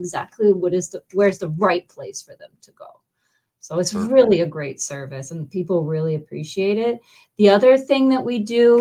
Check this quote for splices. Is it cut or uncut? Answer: uncut